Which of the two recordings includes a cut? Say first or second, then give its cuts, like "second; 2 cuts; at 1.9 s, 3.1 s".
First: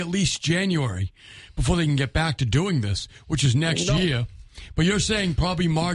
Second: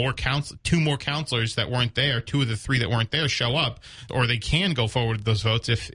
second; 1 cut; at 4.1 s